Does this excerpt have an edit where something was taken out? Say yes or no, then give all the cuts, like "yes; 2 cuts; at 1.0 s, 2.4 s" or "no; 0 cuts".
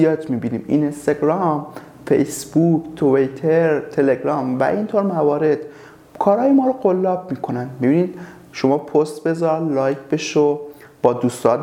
no; 0 cuts